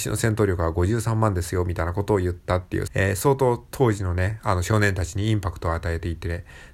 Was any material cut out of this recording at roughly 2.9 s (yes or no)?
yes